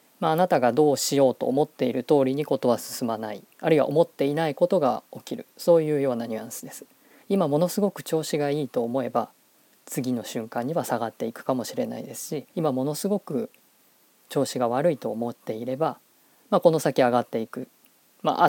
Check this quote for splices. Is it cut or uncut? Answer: cut